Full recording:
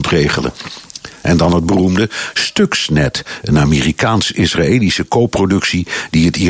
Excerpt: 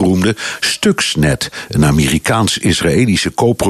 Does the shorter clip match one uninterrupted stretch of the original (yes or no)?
yes